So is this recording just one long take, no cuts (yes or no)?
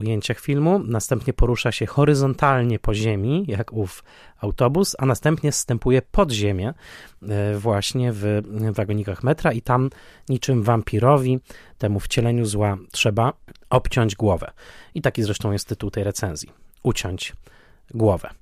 yes